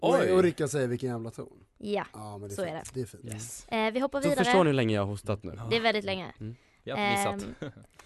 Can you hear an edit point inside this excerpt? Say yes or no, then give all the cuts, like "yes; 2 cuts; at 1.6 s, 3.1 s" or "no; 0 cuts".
no; 0 cuts